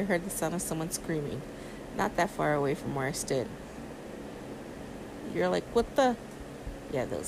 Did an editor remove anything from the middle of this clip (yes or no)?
yes